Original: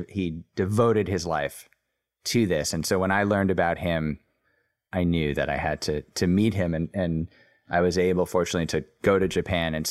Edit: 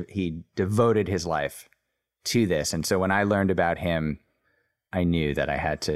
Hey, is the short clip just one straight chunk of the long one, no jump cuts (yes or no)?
yes